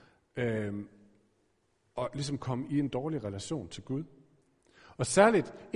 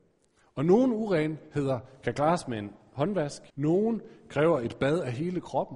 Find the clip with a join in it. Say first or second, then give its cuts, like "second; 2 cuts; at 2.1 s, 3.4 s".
second; 1 cut; at 3.5 s